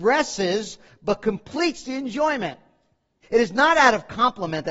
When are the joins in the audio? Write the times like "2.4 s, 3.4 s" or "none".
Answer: 3.2 s